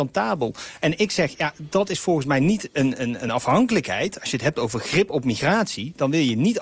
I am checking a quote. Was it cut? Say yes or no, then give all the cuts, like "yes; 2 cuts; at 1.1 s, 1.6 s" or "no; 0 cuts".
no; 0 cuts